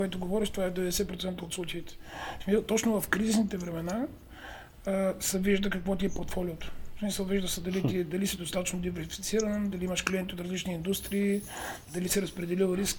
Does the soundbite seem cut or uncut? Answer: uncut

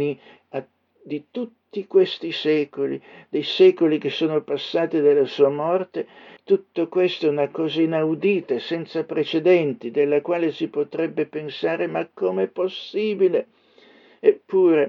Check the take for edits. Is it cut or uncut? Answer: cut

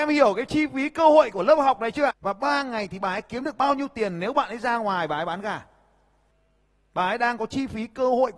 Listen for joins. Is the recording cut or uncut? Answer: cut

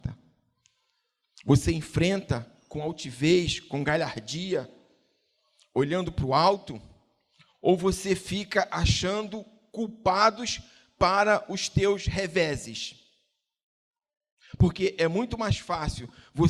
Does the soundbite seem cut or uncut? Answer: uncut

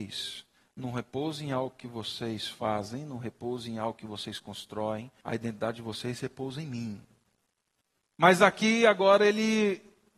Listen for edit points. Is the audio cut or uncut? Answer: cut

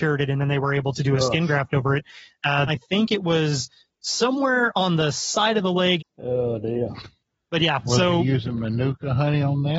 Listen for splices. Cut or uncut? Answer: cut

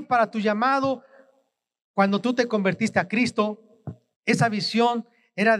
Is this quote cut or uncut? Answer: uncut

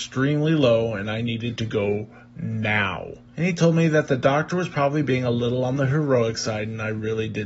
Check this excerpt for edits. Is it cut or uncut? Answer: cut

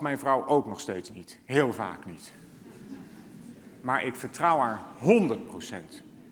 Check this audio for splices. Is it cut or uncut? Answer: uncut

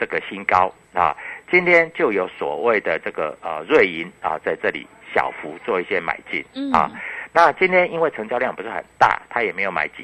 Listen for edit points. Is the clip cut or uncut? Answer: uncut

